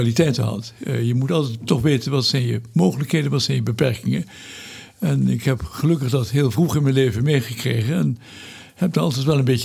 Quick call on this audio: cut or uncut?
uncut